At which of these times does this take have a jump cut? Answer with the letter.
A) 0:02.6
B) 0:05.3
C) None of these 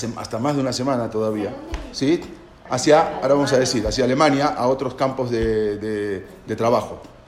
C